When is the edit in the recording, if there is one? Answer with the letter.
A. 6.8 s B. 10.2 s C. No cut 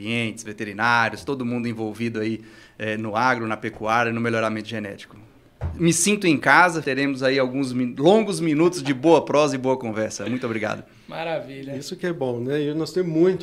A